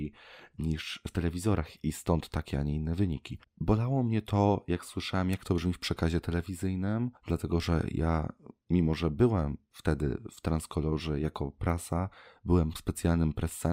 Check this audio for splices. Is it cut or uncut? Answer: cut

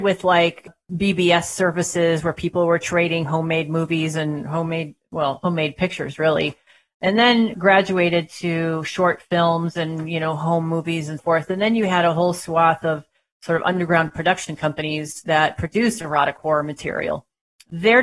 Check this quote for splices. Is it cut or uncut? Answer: cut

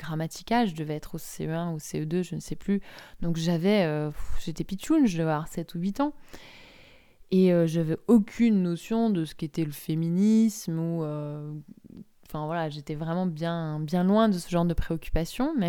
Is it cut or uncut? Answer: uncut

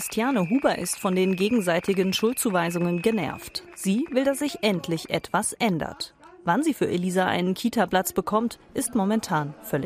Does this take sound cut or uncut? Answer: uncut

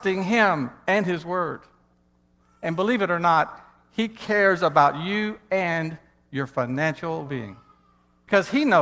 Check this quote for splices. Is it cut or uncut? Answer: cut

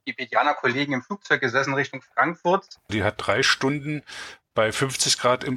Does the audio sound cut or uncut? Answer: cut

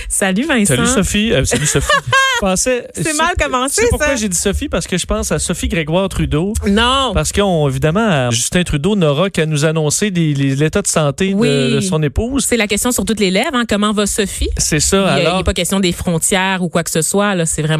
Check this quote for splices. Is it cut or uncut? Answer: cut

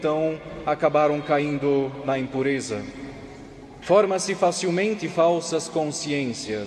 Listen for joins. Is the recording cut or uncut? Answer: cut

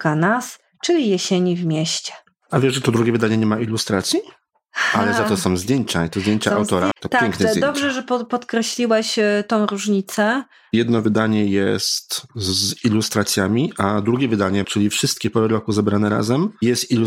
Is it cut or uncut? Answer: cut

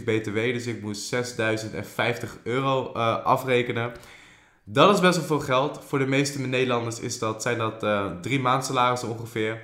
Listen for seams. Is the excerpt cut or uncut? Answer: uncut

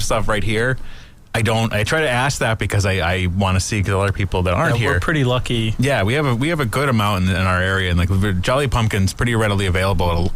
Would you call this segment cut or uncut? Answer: uncut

